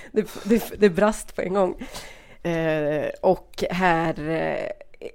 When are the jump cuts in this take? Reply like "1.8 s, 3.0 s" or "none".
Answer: 2.4 s